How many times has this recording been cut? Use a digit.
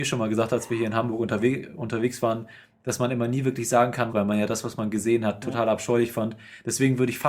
1